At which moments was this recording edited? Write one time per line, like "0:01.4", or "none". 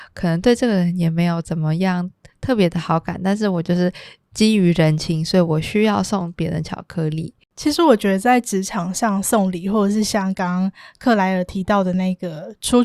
0:07.4